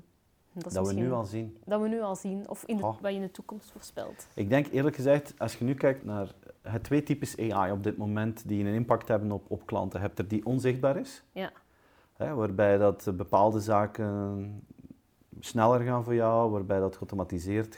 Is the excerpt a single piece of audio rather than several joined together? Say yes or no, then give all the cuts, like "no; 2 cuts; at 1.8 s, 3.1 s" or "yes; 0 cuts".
no; 1 cut; at 6.0 s